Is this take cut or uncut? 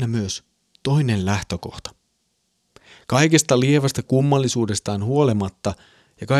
uncut